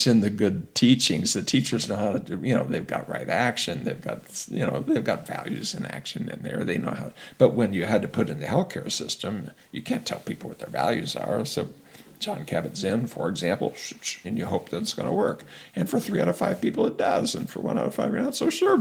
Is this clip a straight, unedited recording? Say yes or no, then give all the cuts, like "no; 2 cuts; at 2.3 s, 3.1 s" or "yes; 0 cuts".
no; 1 cut; at 14.2 s